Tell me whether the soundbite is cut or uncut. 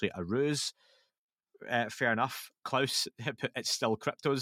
uncut